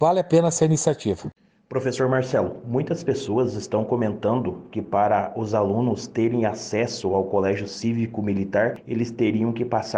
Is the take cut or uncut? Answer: uncut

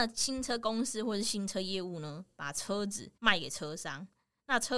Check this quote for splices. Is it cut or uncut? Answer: cut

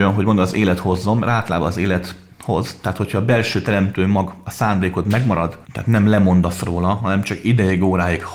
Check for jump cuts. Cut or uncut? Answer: cut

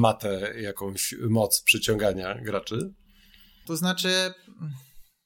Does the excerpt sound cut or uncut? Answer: cut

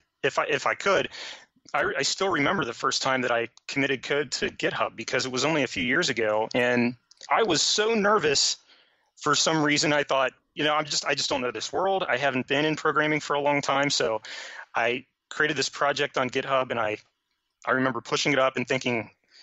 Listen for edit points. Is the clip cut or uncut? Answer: uncut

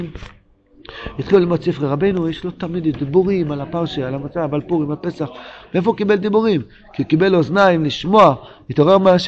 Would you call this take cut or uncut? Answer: uncut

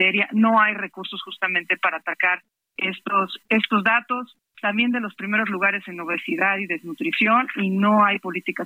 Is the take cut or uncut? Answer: uncut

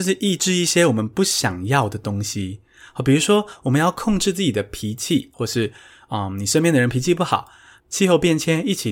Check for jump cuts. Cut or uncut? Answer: cut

